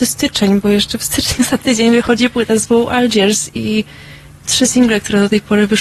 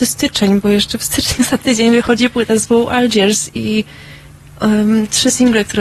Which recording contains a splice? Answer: first; 1 cut; at 4.4 s

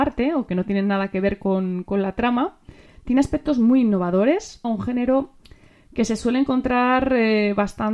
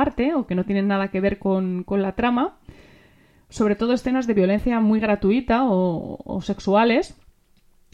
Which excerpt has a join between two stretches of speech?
first; 2 cuts; at 2.9 s, 4.6 s

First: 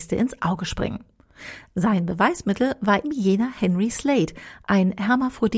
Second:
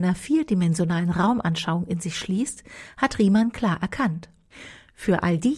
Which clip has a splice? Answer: first; 1 cut; at 3.0 s

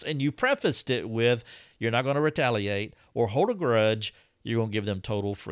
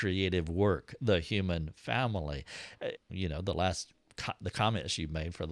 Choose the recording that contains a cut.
second; 1 cut; at 3.0 s

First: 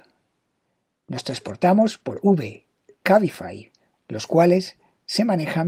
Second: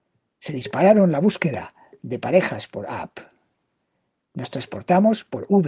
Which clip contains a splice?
first; 1 cut; at 3.9 s

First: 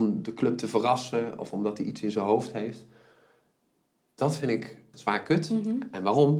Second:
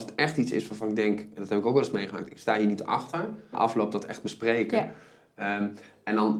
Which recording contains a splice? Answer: second; 1 cut; at 3.5 s

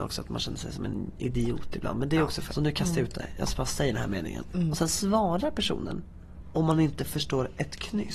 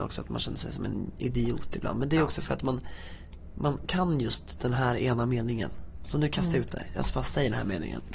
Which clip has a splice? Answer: first; 2 cuts; at 2.5 s, 4.5 s

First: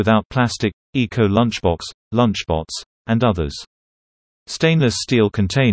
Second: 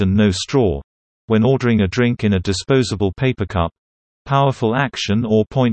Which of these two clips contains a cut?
second; 1 cut; at 4.0 s

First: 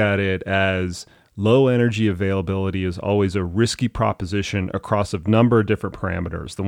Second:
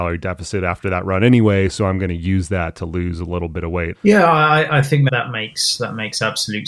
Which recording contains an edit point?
second; 2 cuts; at 3.9 s, 5.1 s

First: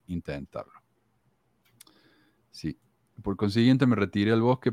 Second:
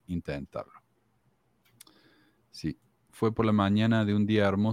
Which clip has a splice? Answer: second; 1 cut; at 3.1 s

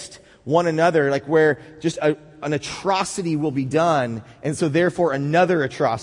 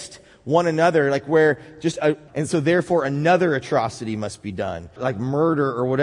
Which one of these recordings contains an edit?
second; 2 cuts; at 2.3 s, 5.0 s

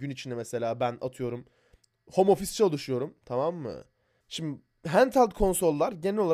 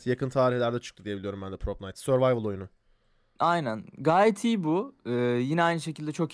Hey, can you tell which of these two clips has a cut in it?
first; 1 cut; at 4.2 s

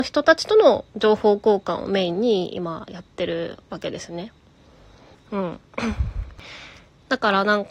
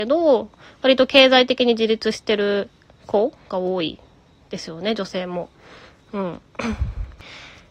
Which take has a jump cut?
first; 1 cut; at 5.1 s

